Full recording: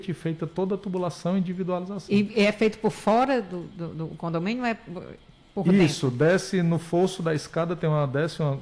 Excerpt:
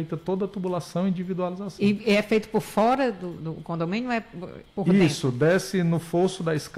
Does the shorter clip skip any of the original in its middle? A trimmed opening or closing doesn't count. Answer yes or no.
yes